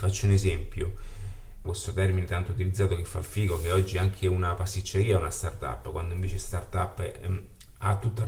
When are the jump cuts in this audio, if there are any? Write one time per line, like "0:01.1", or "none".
0:01.6

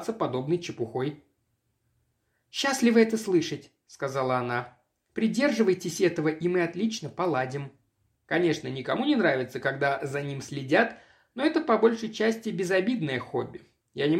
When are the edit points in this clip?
0:08.2

